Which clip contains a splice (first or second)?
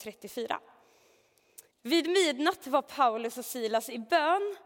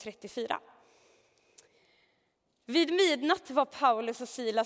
first